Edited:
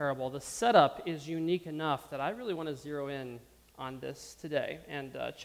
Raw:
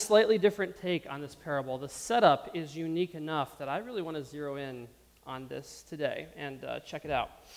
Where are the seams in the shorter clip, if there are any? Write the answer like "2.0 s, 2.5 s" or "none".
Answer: none

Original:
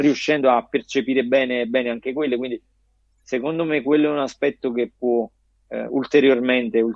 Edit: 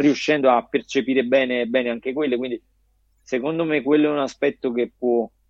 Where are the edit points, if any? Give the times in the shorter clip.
none

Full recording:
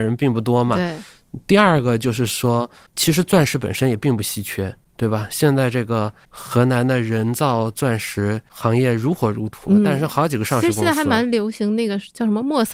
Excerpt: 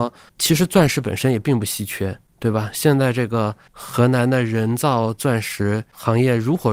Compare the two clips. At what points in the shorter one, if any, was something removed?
none

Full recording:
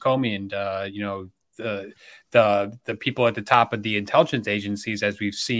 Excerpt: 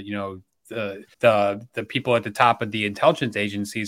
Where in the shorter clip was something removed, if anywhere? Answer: 1.1 s

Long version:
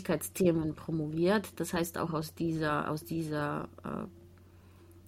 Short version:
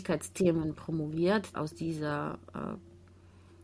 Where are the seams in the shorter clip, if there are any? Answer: 1.5 s

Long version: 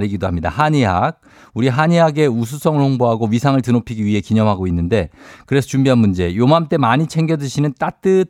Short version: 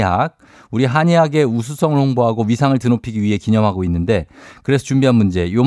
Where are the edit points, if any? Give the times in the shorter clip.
none

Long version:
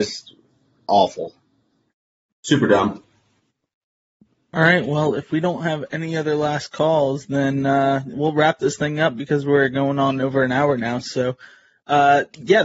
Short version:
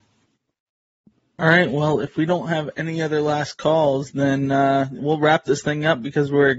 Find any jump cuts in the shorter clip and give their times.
none

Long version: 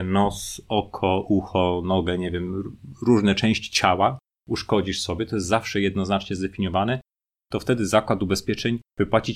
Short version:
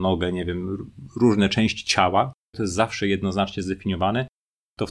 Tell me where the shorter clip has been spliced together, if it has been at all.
2.5 s

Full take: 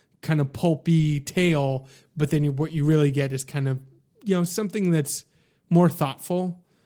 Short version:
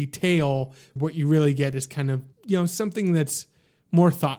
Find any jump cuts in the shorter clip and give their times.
1.0 s, 2.3 s

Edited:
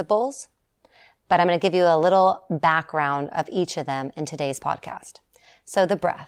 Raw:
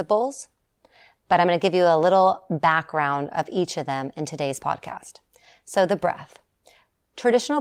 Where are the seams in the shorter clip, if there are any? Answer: none

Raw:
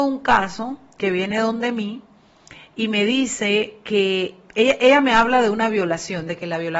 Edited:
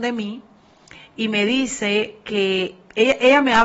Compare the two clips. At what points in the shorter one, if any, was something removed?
none

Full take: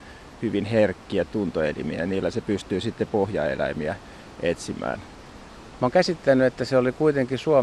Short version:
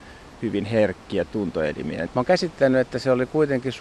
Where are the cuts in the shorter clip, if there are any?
2.1 s

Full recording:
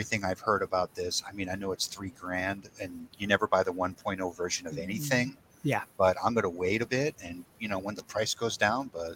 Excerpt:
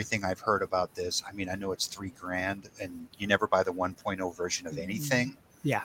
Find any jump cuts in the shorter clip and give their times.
none

